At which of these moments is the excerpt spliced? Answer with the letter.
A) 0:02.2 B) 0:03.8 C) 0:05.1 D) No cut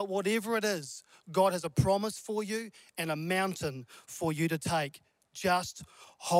D